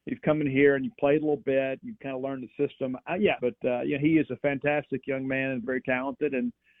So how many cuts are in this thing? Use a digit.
2